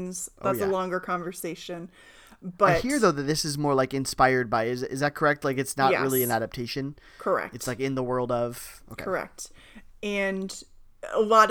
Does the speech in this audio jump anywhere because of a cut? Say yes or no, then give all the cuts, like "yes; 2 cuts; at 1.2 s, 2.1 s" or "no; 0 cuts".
no; 0 cuts